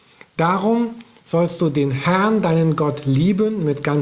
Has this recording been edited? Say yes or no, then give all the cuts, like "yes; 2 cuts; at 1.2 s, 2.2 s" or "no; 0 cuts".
no; 0 cuts